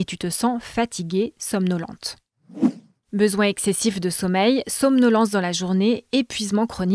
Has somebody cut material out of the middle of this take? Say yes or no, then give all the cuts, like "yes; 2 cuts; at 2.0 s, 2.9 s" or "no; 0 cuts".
no; 0 cuts